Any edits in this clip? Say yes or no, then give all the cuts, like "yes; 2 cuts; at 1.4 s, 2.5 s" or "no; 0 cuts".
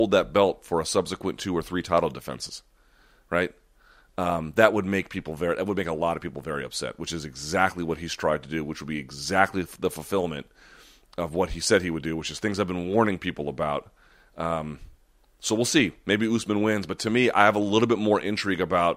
no; 0 cuts